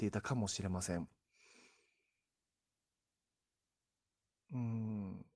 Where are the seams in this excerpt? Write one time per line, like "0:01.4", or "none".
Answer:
none